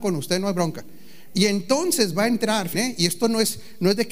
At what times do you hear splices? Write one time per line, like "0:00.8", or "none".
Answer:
0:01.3
0:02.7